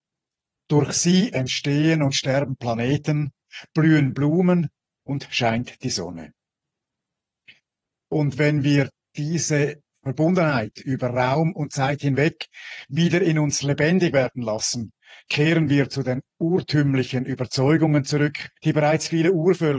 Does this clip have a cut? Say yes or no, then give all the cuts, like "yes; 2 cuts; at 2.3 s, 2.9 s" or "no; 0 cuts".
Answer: yes; 2 cuts; at 8.0 s, 18.6 s